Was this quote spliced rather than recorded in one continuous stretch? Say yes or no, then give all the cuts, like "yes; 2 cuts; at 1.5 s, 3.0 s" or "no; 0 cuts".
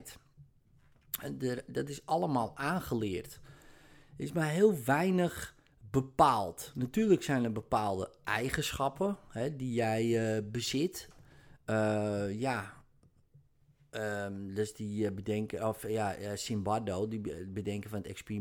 yes; 1 cut; at 11.6 s